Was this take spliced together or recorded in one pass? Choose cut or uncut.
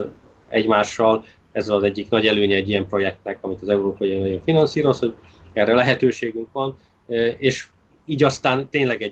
uncut